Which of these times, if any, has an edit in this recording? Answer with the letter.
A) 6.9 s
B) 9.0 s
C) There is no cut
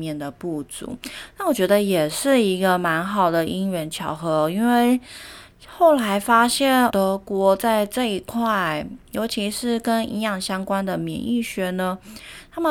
A